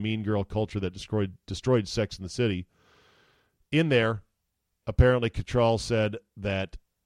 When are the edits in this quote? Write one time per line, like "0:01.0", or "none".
none